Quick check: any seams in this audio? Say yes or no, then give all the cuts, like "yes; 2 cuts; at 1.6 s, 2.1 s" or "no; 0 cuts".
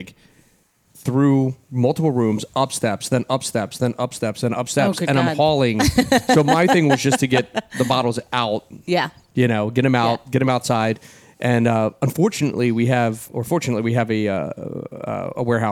no; 0 cuts